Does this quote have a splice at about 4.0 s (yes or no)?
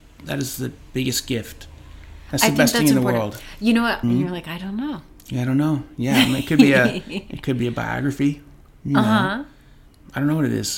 yes